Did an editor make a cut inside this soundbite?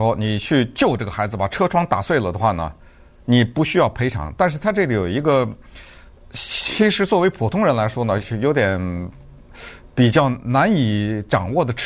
no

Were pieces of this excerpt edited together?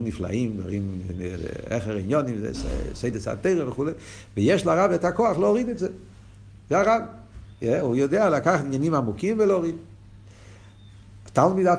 no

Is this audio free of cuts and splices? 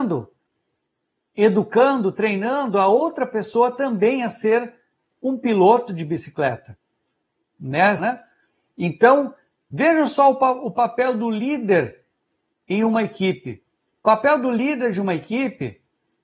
no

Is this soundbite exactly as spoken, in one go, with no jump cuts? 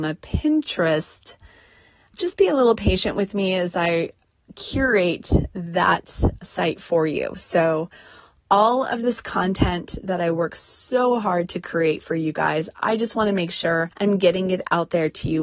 no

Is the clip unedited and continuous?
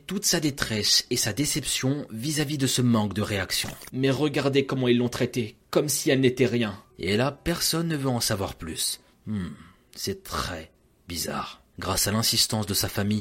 no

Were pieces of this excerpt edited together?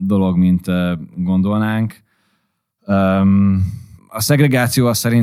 yes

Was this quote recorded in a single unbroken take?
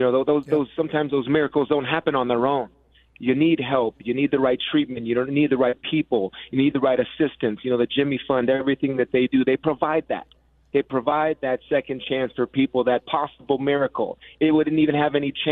yes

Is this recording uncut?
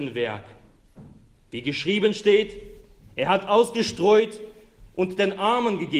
yes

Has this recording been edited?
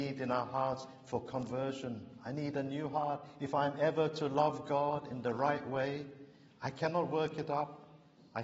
no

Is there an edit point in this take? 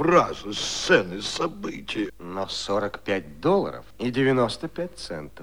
yes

